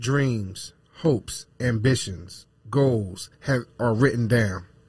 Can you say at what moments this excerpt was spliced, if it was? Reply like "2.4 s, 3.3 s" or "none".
none